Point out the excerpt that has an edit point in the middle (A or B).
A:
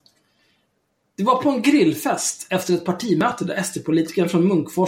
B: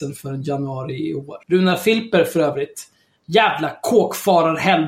B